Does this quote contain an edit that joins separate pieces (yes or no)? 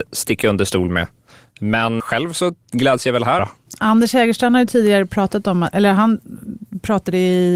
yes